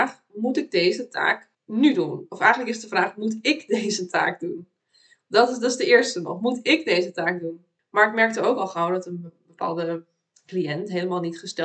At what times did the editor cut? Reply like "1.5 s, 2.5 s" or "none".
1.5 s, 7.8 s